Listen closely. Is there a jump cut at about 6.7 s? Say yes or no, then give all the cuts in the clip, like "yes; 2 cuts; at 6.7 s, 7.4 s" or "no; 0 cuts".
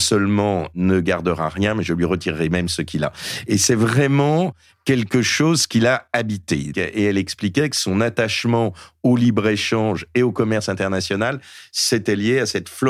yes; 1 cut; at 6.7 s